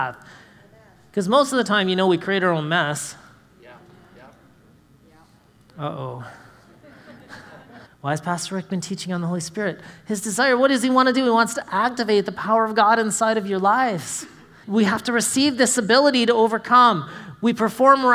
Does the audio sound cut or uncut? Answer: cut